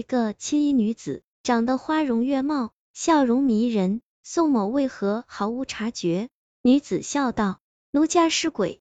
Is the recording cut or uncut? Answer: cut